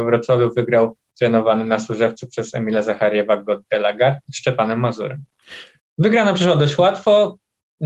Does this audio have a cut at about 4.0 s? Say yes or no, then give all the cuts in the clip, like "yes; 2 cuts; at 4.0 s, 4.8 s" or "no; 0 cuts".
no; 1 cut; at 5.8 s